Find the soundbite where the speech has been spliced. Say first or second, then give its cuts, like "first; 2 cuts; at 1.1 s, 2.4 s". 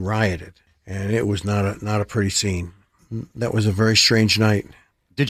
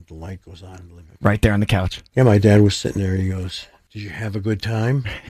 second; 1 cut; at 3.9 s